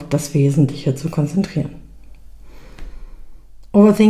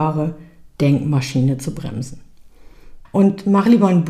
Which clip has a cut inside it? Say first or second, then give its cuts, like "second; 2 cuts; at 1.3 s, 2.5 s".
second; 1 cut; at 3.0 s